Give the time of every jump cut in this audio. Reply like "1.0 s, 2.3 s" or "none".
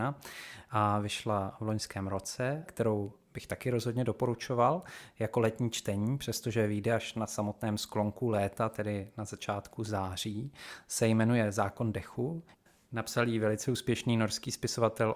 2.7 s

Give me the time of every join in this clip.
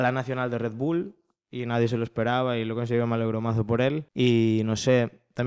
4.1 s

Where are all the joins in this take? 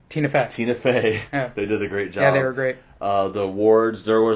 none

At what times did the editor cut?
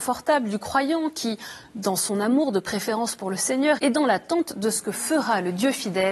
3.8 s

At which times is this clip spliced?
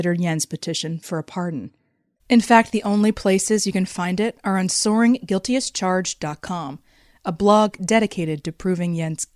2.2 s

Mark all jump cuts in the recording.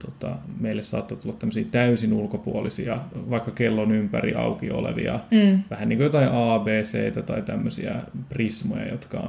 none

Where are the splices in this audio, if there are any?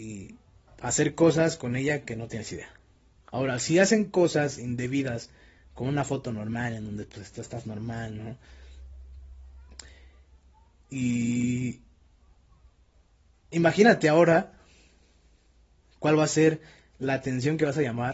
3.2 s

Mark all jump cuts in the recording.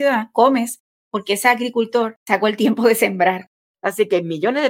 3.7 s

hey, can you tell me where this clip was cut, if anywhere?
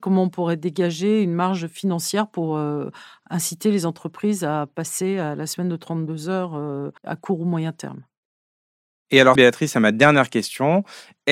7.0 s, 9.4 s

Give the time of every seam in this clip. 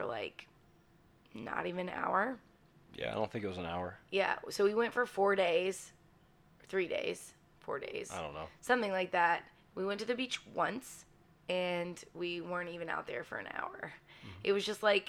none

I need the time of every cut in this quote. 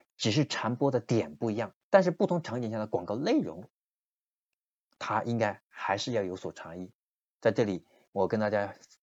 7.3 s

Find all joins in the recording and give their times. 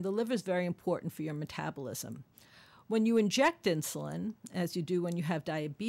none

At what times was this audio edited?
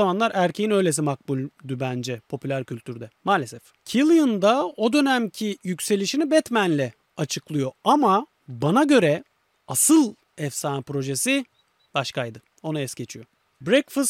none

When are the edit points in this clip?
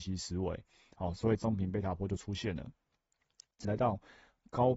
3.6 s

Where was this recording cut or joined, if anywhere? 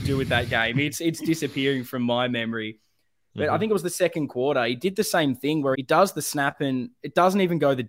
5.7 s

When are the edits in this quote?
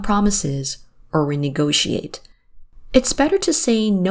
none

